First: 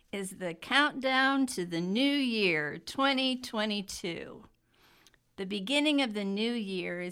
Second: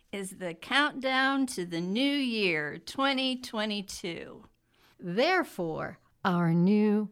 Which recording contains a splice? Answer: second; 2 cuts; at 4.9 s, 6.1 s

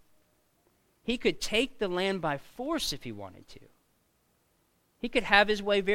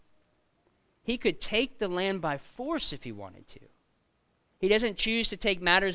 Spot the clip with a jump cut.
second; 1 cut; at 4.5 s

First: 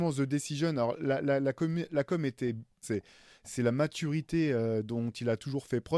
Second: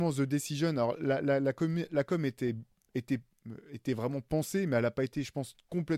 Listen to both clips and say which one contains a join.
first; 1 cut; at 2.8 s

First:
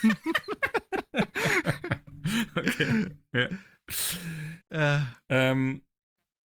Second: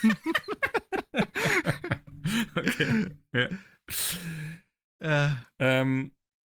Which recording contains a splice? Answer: first; 1 cut; at 4.6 s

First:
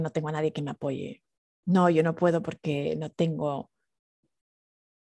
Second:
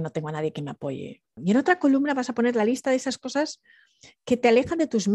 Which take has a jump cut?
second; 1 cut; at 1.4 s

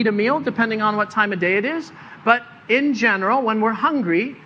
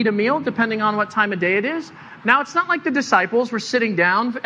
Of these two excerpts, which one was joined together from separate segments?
second; 1 cut; at 2.2 s

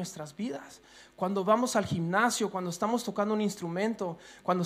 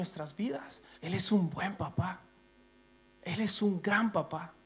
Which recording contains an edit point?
second; 1 cut; at 0.9 s

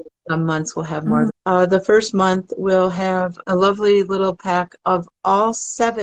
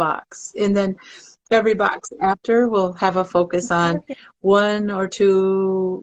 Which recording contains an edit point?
first; 2 cuts; at 1.3 s, 3.4 s

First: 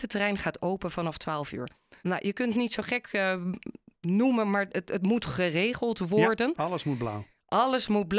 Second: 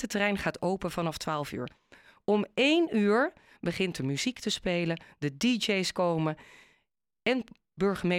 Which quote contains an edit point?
first; 1 cut; at 2.0 s

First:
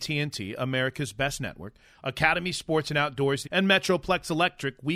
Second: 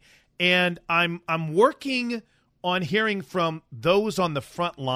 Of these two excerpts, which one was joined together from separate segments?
first; 1 cut; at 3.4 s

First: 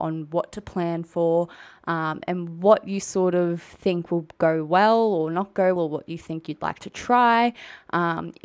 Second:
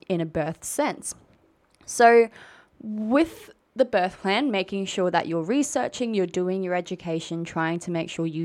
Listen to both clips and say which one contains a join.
first; 1 cut; at 5.8 s

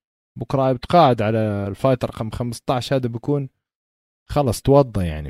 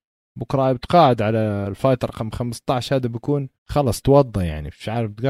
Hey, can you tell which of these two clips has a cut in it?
second; 1 cut; at 3.6 s

